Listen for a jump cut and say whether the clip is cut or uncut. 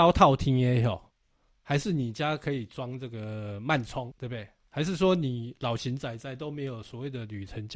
uncut